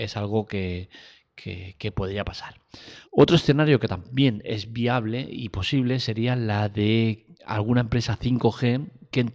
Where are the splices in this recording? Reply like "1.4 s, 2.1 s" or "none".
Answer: 3.0 s, 7.3 s